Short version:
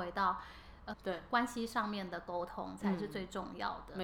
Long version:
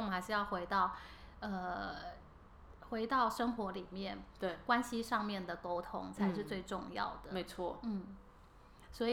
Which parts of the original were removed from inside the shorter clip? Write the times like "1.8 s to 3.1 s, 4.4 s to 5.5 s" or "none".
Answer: 1.5 s to 4.3 s